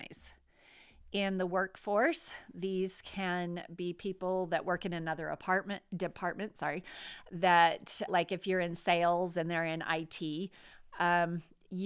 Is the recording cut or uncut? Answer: cut